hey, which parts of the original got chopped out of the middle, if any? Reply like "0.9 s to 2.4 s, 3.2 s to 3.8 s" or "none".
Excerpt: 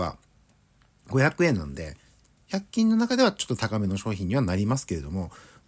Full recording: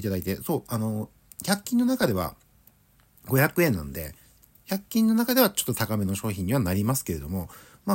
none